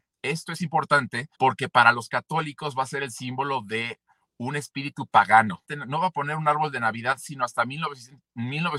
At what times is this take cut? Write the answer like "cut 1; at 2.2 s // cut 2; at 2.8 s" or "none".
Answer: cut 1; at 1.3 s // cut 2; at 5.6 s